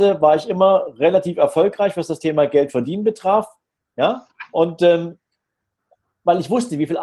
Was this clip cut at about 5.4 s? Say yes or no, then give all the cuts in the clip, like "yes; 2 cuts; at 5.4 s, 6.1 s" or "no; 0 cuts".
no; 1 cut; at 3.8 s